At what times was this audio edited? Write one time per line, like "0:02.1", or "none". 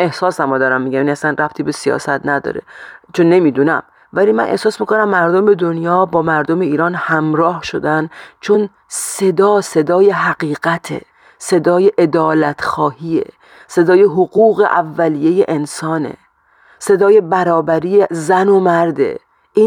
none